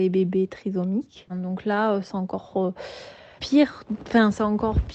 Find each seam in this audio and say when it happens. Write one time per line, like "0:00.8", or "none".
0:01.3
0:03.4